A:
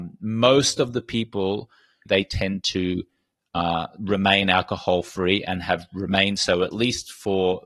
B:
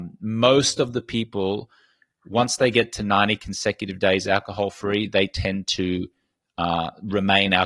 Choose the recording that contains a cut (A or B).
A